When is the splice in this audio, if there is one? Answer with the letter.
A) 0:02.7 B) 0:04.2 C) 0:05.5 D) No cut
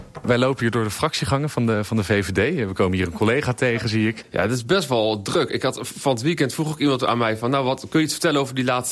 B